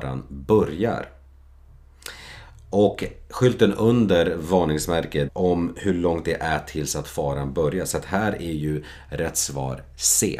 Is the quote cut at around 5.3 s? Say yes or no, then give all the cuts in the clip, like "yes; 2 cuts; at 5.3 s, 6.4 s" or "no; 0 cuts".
yes; 1 cut; at 5.3 s